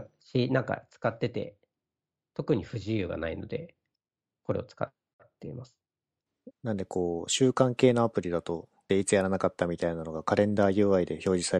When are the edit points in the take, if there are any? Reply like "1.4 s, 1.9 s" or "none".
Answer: 6.5 s, 8.9 s